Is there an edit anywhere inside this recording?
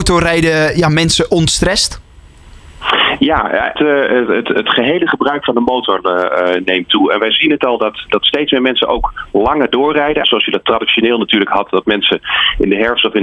yes; 2 cuts; at 3.8 s, 10.2 s

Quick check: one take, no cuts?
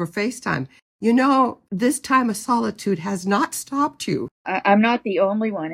no; 1 cut; at 1.6 s

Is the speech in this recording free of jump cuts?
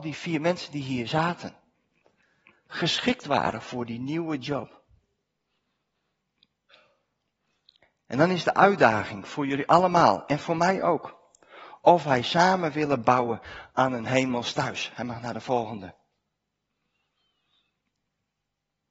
yes; 0 cuts

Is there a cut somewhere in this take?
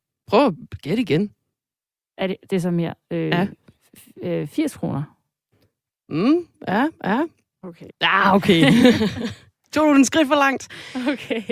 yes; 2 cuts; at 6.5 s, 7.9 s

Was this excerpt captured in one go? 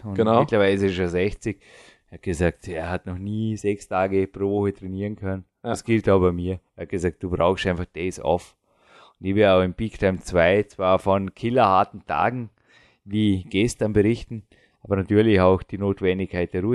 yes; 0 cuts

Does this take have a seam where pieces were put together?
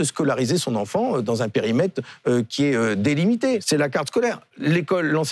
yes; 1 cut; at 3.6 s

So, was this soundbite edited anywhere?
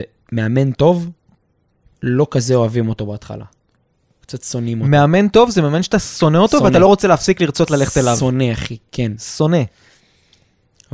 no; 0 cuts

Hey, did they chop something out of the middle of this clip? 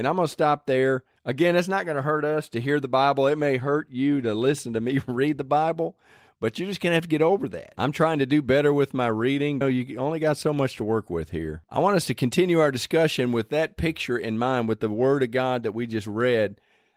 yes; 1 cut; at 9.6 s

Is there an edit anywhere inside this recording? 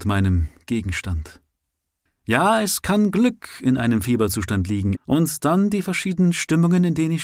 yes; 2 cuts; at 2.1 s, 5.0 s

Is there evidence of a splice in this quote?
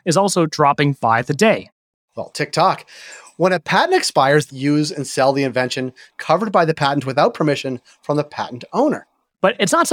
yes; 1 cut; at 4.5 s

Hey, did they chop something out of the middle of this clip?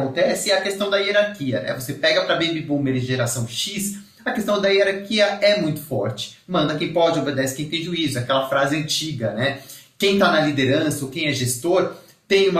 no; 0 cuts

